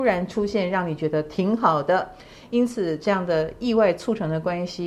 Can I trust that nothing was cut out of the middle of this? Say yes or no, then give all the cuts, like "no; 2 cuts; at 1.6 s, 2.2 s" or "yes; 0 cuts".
yes; 0 cuts